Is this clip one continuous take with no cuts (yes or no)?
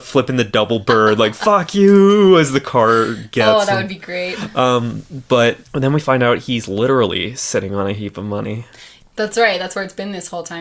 no